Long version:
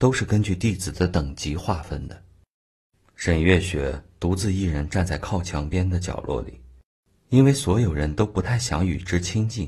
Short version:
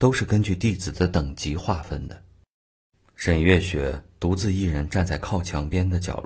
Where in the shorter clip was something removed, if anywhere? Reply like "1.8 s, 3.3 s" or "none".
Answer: none